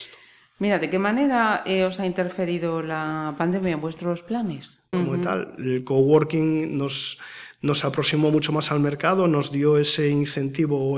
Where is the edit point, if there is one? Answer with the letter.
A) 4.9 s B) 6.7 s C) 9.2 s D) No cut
A